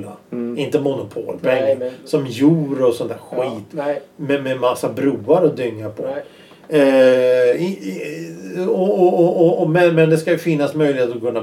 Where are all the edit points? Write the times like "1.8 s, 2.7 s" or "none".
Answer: none